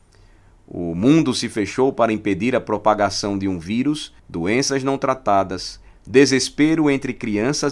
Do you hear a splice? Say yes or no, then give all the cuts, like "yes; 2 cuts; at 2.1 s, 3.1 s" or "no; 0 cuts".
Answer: yes; 2 cuts; at 4.2 s, 5.9 s